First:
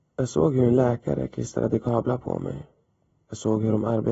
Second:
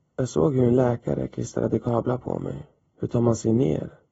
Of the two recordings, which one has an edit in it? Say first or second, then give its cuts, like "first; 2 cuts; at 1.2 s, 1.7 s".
second; 1 cut; at 2.8 s